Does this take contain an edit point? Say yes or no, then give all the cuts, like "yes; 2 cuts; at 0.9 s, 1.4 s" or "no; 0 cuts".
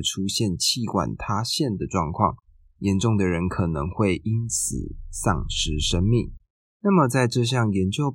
no; 0 cuts